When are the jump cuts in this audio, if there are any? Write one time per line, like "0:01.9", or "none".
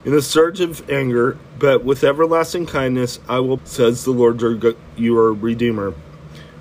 0:01.5
0:03.6